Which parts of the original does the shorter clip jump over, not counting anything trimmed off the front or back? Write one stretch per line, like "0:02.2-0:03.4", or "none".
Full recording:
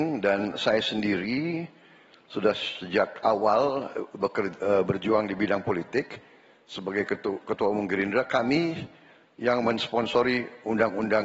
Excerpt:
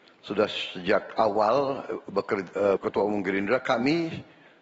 0:04.8-0:07.4